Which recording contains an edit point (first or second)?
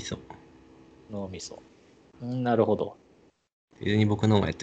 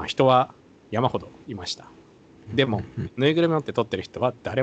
first